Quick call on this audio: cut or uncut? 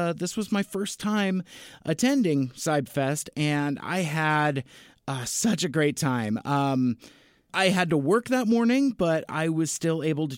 uncut